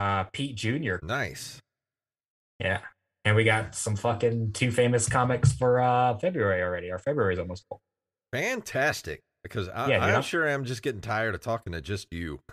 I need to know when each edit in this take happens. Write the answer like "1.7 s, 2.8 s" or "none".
1.0 s